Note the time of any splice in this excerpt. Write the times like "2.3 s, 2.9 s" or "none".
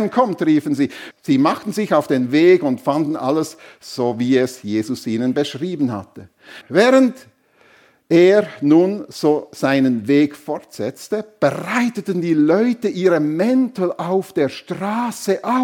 1.1 s, 6.6 s